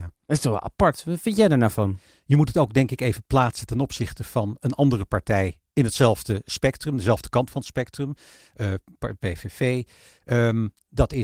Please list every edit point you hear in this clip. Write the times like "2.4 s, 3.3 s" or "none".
none